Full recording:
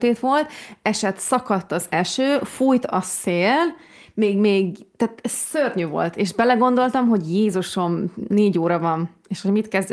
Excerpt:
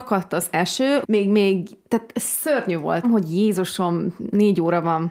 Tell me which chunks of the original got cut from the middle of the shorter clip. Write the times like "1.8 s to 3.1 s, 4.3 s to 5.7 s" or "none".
2.4 s to 4.1 s, 6.1 s to 7.0 s